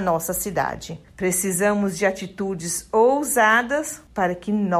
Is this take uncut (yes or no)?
no